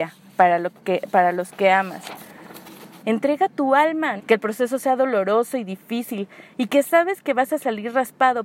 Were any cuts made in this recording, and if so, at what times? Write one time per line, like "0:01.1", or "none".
0:03.0
0:04.2